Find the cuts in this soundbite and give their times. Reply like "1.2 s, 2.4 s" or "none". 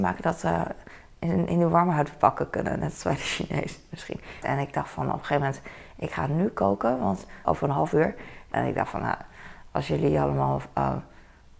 4.4 s, 7.4 s, 8.5 s